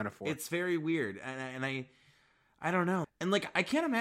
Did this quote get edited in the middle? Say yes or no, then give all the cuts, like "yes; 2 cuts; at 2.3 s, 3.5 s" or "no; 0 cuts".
yes; 1 cut; at 3.0 s